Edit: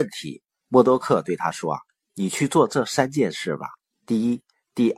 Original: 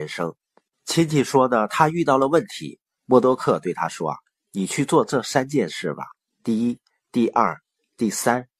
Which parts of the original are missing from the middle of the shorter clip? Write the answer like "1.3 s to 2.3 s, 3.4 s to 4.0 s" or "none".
none

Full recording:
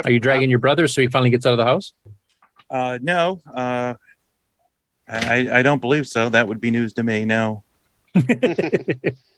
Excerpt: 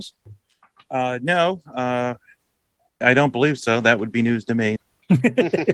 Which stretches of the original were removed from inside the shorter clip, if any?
4.8 s to 5.5 s, 7.2 s to 7.8 s

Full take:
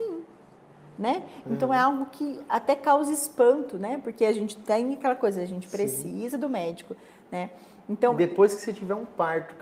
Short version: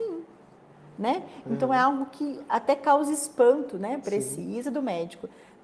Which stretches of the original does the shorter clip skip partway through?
4.0 s to 5.7 s

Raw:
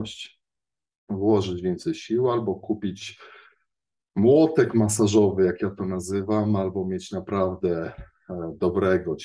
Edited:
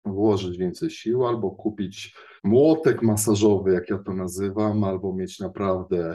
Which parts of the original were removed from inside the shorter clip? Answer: 3.4 s to 4.1 s

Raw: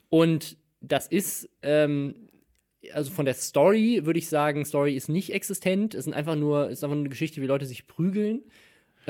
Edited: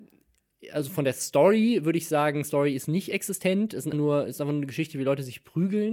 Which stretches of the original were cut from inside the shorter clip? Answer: 6.1 s to 6.4 s

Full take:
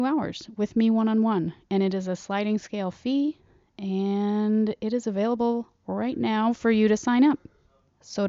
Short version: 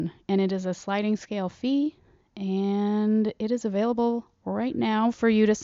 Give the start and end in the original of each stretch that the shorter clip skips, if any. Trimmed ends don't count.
none

